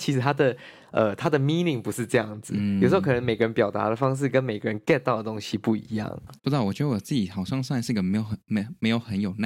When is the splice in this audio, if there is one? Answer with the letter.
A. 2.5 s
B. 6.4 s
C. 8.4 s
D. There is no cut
B